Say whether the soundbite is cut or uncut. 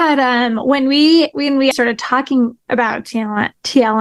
cut